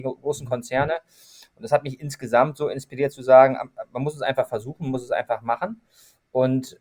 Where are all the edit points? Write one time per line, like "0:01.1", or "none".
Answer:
none